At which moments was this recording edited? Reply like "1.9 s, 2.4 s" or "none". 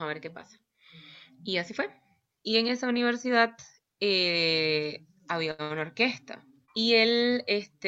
2.4 s, 6.7 s